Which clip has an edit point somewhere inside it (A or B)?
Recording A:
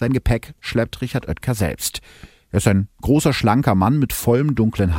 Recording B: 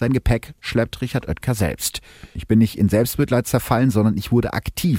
B